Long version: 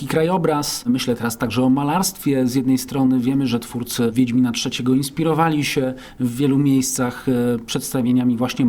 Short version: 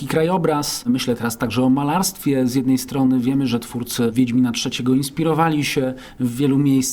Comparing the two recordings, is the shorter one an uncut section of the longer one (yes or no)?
yes